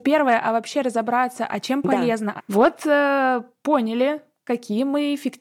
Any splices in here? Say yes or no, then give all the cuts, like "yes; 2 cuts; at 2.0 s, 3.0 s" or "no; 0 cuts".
yes; 1 cut; at 2.4 s